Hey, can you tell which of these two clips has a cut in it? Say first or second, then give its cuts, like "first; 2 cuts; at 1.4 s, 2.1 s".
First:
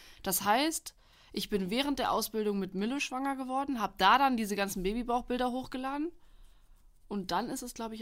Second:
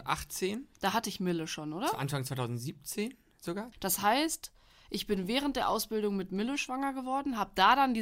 second; 1 cut; at 3.7 s